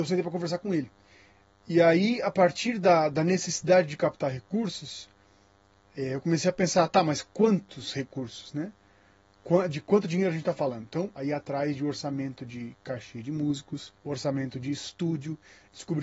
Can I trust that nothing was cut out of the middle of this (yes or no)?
no